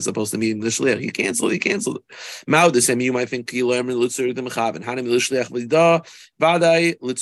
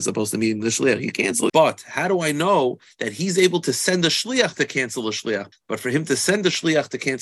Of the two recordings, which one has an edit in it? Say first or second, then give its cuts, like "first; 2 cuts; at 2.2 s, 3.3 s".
second; 2 cuts; at 1.5 s, 5.5 s